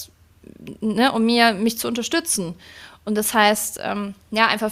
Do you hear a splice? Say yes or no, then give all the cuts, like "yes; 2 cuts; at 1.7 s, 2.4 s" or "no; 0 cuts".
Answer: no; 0 cuts